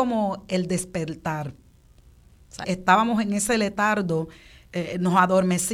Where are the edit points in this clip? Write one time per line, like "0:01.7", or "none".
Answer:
0:02.6